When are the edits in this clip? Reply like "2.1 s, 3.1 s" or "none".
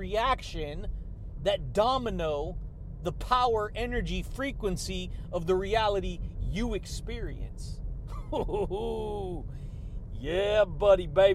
none